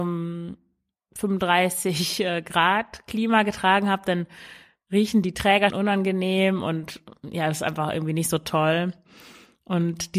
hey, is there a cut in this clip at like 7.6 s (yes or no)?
no